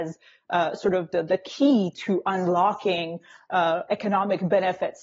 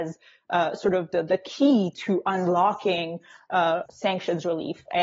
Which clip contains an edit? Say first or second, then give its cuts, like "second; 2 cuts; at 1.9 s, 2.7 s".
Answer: second; 1 cut; at 3.9 s